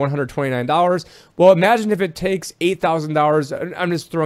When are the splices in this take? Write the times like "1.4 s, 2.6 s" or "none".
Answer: none